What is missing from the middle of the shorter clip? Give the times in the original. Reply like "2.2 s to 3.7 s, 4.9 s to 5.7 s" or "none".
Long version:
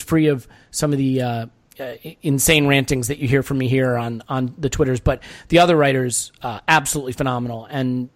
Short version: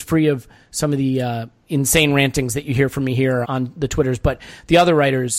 1.6 s to 2.2 s, 4.0 s to 4.2 s